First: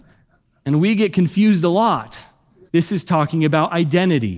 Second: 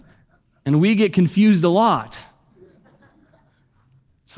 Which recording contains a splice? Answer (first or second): first